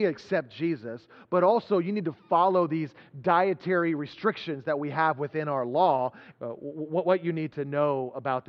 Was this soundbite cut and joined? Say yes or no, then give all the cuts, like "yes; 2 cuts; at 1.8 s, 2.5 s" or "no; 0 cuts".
yes; 1 cut; at 6.3 s